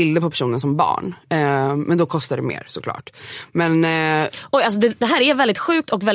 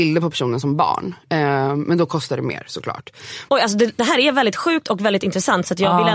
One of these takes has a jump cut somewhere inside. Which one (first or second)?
second